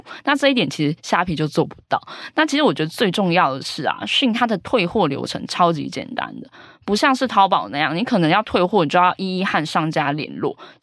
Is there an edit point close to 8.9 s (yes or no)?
no